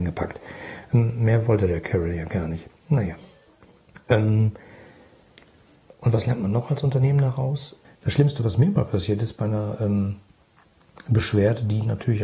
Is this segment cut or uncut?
cut